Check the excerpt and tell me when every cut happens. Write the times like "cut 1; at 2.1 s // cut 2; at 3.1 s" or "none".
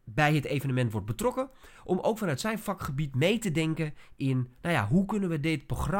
none

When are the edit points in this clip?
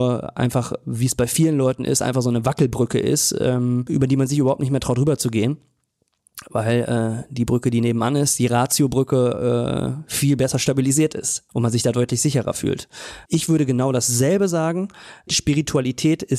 cut 1; at 11.5 s // cut 2; at 13.3 s

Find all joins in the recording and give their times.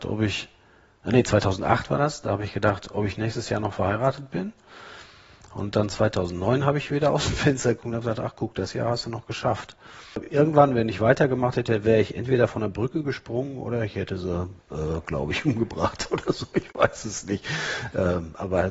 none

